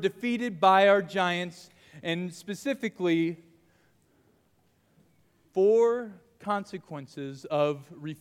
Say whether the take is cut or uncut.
uncut